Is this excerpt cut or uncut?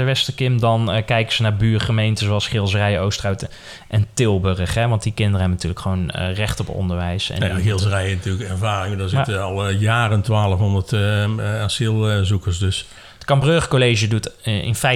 uncut